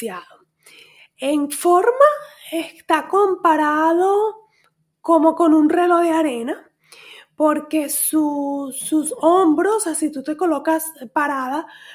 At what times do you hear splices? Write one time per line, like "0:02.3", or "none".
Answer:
none